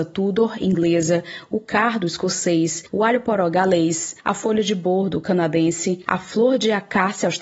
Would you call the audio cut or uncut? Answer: uncut